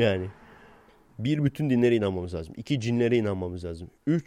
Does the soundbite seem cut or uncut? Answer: uncut